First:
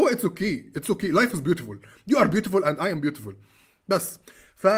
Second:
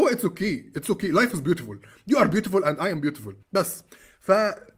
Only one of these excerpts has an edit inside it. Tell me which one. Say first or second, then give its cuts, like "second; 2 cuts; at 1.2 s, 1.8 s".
second; 1 cut; at 3.4 s